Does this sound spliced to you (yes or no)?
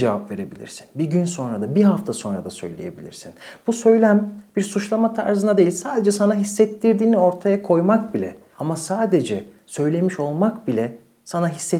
yes